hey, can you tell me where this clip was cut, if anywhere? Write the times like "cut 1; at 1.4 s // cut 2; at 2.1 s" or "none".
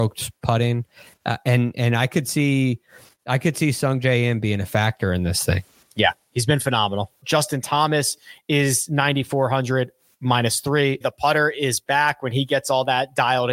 cut 1; at 7.2 s // cut 2; at 11.0 s